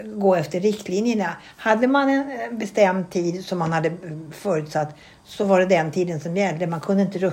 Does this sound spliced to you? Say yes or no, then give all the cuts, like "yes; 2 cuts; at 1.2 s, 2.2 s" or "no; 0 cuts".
no; 0 cuts